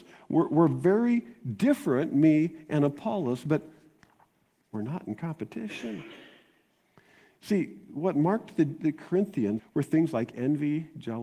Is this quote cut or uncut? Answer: cut